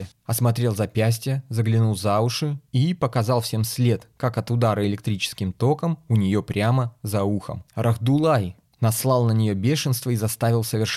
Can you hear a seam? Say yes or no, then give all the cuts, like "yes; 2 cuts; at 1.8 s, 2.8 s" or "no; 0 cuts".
no; 0 cuts